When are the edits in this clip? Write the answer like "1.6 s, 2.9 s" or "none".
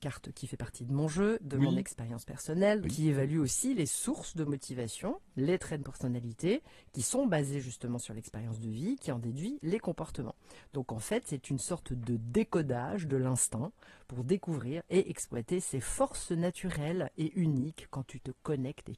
2.8 s